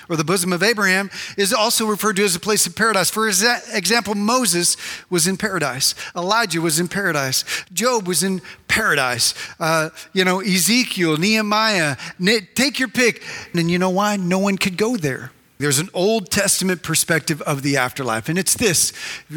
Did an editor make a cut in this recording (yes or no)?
yes